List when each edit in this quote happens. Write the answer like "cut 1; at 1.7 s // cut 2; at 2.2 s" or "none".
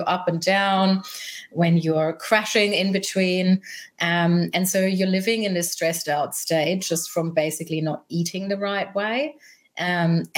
none